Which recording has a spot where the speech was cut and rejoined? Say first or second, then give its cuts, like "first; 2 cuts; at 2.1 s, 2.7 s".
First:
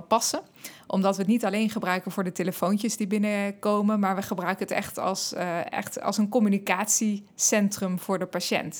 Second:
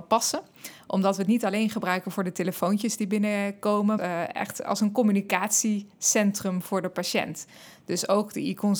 second; 1 cut; at 4.0 s